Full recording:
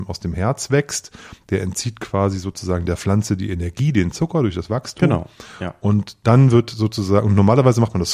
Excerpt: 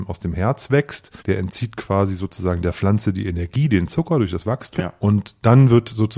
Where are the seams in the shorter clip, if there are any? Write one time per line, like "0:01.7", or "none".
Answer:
0:01.2
0:04.8